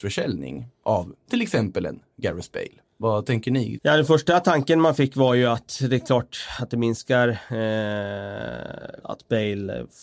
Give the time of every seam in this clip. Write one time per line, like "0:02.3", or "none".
0:03.8
0:09.0